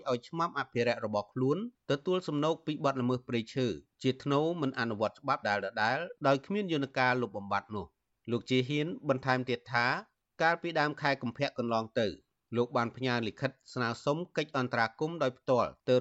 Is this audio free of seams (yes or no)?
no